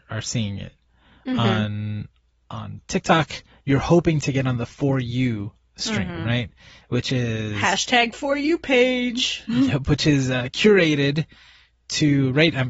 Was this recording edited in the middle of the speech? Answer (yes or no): no